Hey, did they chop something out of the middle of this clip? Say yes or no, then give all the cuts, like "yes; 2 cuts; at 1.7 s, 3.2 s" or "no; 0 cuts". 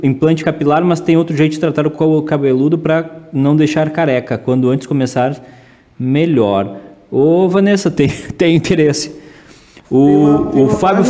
no; 0 cuts